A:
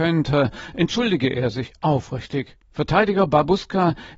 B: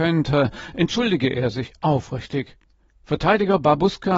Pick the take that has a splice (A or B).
A